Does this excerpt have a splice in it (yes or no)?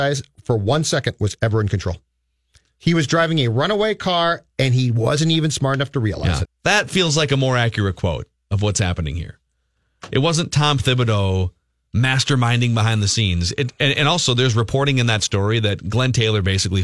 yes